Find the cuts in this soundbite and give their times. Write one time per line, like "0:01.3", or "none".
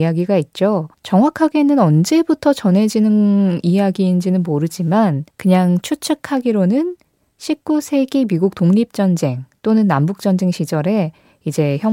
0:00.9
0:05.3

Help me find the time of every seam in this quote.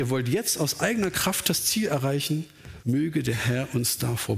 0:02.8

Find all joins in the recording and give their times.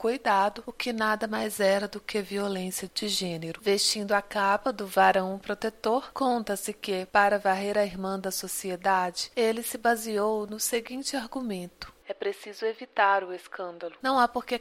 none

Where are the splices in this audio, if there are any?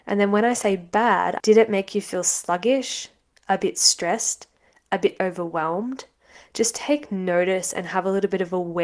0:01.4

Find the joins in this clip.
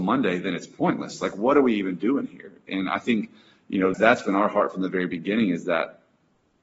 0:03.9

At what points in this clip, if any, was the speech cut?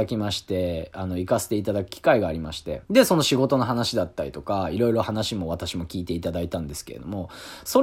0:02.8

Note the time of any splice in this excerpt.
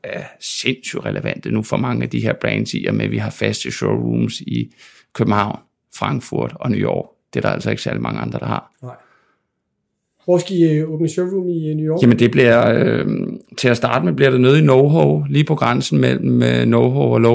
none

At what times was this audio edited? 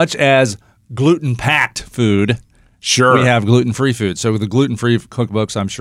none

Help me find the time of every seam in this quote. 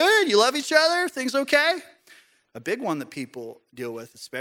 0:02.4

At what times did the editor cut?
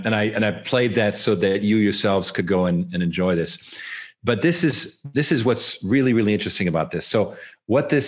none

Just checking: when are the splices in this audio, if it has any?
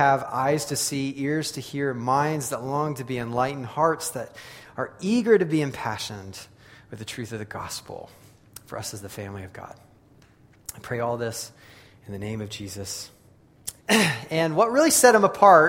0:13.8

